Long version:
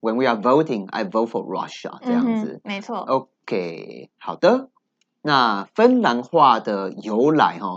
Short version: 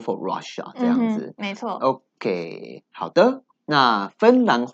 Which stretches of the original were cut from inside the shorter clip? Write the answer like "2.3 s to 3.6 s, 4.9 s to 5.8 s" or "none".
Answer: 4.8 s to 5.1 s

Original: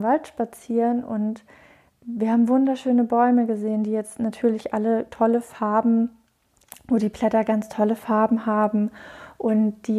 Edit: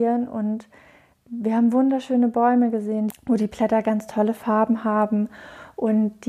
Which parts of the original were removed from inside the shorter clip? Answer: 3.9 s to 6.7 s

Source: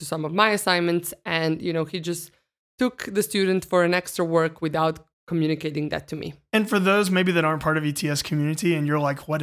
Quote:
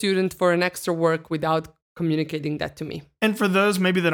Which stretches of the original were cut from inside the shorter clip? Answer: none

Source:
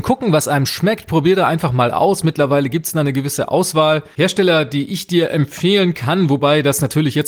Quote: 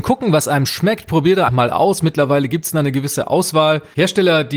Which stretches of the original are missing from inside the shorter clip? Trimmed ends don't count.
1.5 s to 1.7 s

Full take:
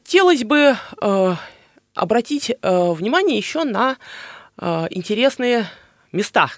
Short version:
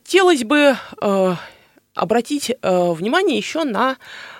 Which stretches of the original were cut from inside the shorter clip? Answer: none

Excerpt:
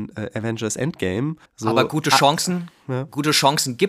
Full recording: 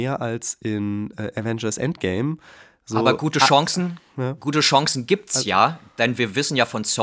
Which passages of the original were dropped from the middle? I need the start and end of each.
2.5 s to 2.7 s

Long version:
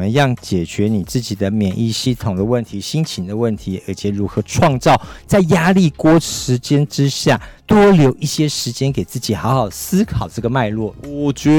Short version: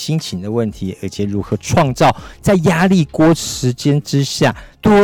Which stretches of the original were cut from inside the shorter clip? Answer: none

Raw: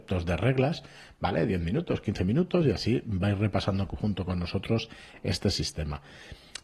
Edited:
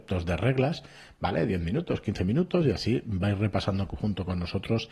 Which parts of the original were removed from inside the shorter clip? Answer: none

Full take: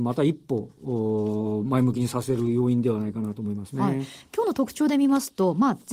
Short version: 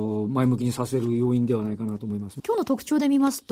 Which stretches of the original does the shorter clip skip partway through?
3.8 s to 4.3 s

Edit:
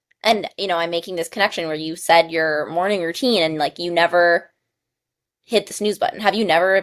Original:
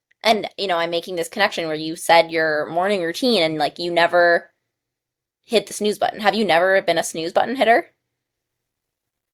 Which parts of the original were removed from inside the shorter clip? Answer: none

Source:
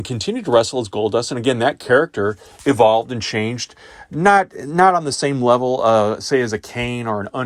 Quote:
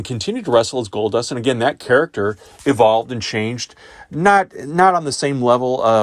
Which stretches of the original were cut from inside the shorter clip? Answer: none

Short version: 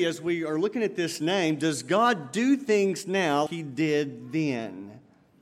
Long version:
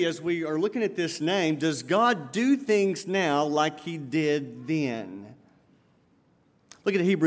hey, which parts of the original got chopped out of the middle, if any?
3.5 s to 3.8 s

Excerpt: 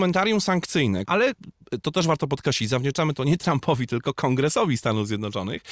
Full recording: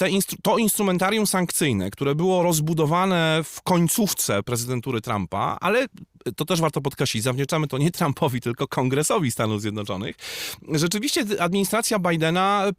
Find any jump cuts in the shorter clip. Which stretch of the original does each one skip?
1.9 s to 5.6 s

